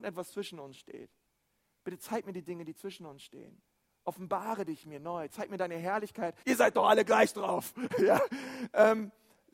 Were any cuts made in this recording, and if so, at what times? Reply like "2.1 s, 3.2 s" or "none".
6.4 s